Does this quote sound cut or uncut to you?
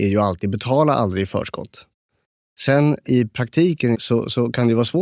cut